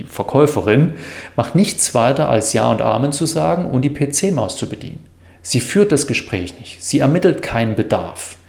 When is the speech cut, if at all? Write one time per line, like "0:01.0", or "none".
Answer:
none